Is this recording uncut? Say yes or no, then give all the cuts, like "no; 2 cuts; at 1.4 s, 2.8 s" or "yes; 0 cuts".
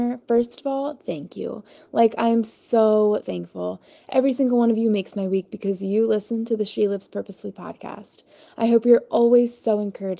no; 1 cut; at 3.2 s